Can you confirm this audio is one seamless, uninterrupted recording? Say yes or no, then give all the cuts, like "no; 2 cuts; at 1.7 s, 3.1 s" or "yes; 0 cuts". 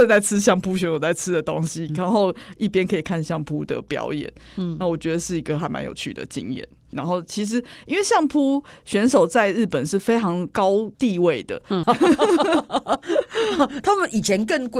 no; 2 cuts; at 6.9 s, 11.8 s